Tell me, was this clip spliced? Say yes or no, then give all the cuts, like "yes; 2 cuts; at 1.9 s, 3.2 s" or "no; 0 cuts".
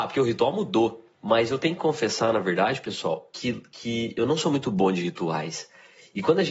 yes; 1 cut; at 1.1 s